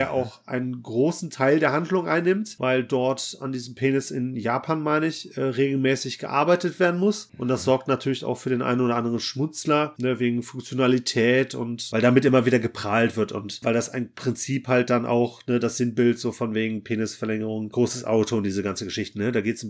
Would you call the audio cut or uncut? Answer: uncut